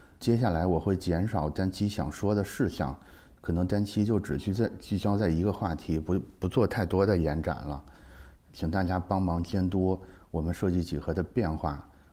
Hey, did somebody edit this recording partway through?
yes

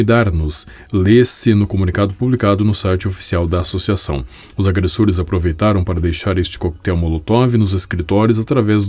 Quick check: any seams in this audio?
no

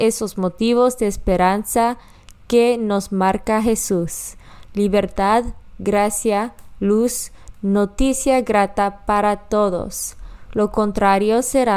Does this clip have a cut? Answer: no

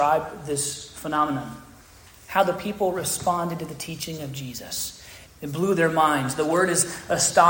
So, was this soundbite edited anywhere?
yes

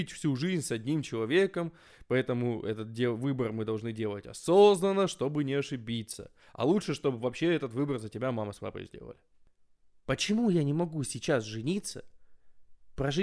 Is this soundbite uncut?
yes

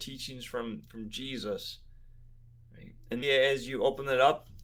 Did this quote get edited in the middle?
yes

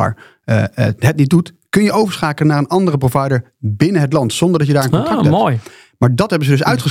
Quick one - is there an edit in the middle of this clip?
no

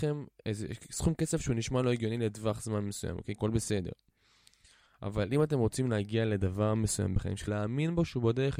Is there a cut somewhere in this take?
yes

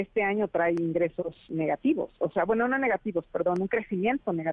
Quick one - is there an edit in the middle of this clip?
no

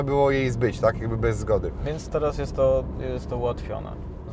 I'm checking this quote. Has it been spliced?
yes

